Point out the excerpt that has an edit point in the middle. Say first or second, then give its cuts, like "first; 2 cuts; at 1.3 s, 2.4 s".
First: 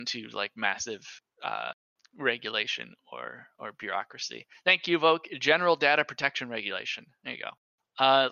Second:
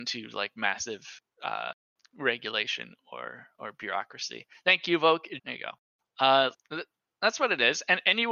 second; 2 cuts; at 5.4 s, 6.5 s